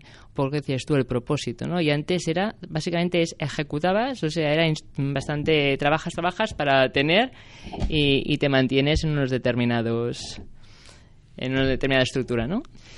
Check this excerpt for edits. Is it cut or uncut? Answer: uncut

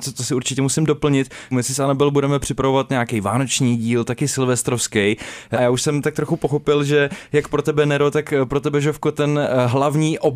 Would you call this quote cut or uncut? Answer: cut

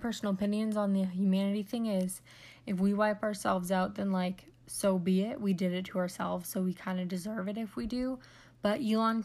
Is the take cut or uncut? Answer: uncut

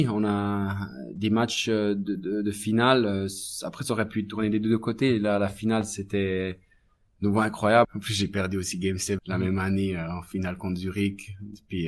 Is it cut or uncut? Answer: cut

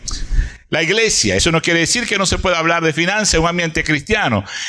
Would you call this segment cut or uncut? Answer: uncut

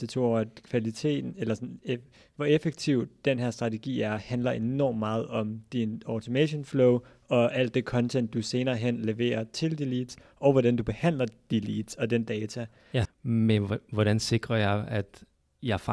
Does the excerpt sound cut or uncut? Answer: cut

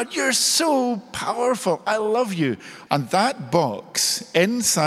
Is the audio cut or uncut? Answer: cut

